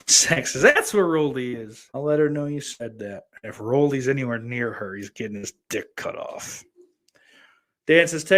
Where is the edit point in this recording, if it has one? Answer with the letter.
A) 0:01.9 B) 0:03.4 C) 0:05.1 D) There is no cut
A